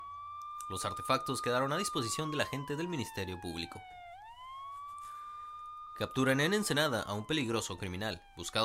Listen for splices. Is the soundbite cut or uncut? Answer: uncut